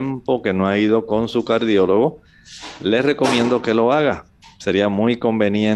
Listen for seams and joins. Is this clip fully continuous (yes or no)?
yes